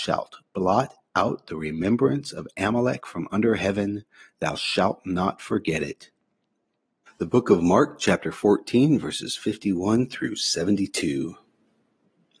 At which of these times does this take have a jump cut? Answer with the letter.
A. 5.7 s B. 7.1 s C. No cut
B